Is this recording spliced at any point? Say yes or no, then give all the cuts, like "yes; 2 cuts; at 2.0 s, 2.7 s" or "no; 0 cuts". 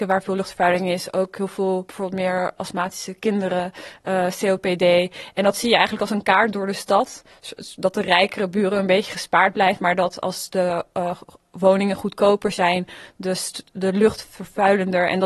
no; 0 cuts